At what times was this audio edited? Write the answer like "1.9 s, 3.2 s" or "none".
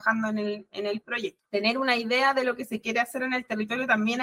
1.4 s